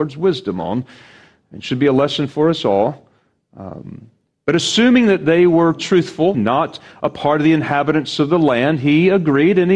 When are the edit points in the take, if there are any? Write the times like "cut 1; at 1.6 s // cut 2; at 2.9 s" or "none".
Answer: cut 1; at 6.3 s